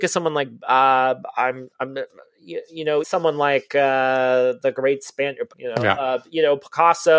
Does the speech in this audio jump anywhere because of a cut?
yes; 2 cuts; at 3.0 s, 5.5 s

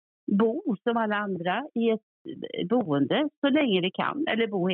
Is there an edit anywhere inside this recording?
no; 0 cuts

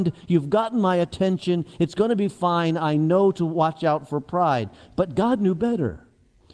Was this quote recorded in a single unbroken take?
yes; 0 cuts

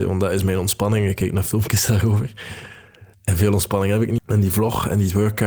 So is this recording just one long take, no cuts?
no; 2 cuts; at 3.1 s, 4.2 s

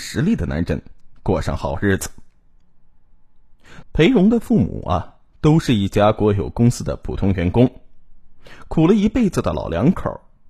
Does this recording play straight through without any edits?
no; 1 cut; at 3.8 s

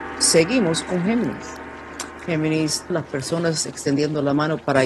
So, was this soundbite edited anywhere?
yes; 1 cut; at 2.9 s

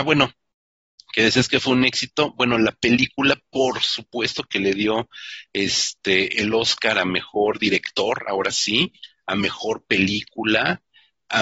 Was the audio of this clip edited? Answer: no; 0 cuts

